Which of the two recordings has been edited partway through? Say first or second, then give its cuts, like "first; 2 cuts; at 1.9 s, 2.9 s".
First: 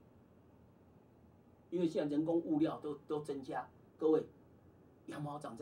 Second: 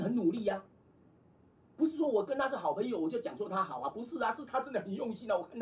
first; 1 cut; at 3.9 s